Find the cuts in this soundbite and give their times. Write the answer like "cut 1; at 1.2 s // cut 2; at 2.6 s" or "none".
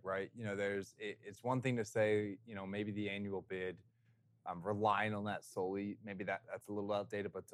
none